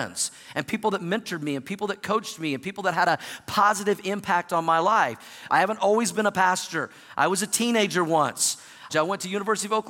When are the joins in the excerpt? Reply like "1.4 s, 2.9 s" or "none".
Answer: 5.5 s, 8.9 s